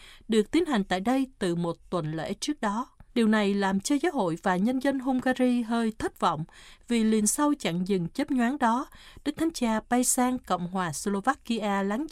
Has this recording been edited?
yes; 1 cut; at 3.1 s

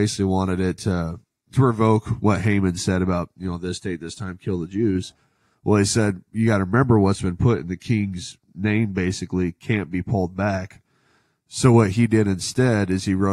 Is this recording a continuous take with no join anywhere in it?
yes; 0 cuts

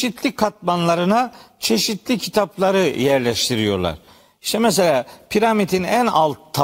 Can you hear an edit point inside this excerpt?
no; 0 cuts

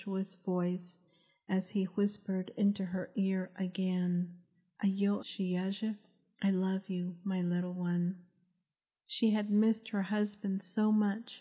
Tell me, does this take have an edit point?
yes; 2 cuts; at 5.2 s, 8.9 s

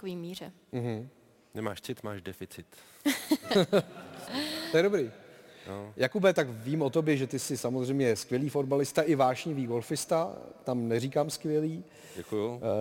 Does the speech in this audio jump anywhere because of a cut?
no; 0 cuts

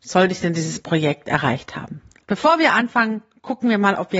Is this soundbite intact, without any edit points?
no; 1 cut; at 2.2 s

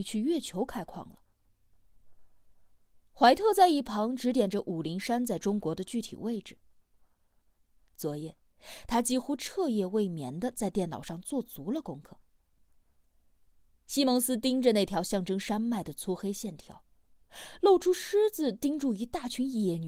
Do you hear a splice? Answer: yes; 1 cut; at 3.0 s

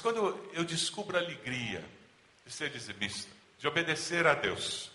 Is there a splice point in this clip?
yes; 1 cut; at 3.4 s

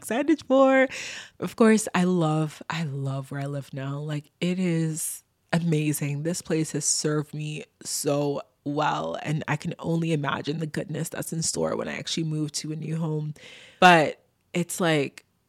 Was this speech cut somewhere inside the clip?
no; 0 cuts

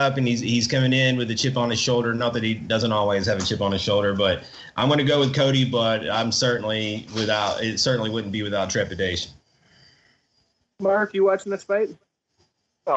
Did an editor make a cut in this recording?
no; 0 cuts

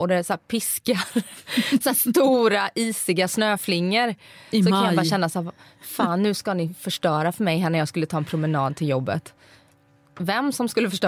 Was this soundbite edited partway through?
no; 0 cuts

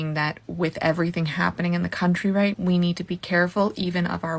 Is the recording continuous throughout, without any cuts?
no; 1 cut; at 2.5 s

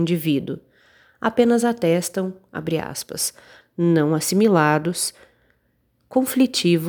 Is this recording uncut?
no; 1 cut; at 3.6 s

